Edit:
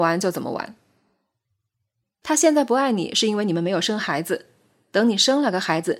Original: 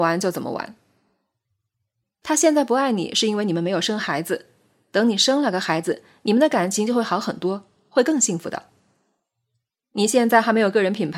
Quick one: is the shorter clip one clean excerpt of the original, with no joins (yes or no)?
yes